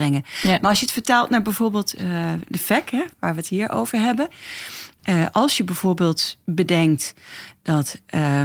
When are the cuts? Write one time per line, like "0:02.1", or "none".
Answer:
none